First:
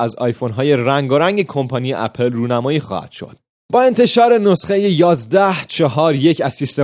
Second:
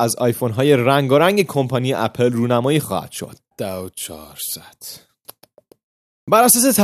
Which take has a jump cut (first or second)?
second